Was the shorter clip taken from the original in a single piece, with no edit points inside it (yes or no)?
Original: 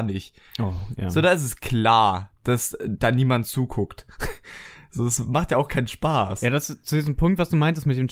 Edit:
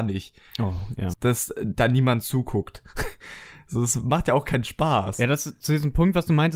no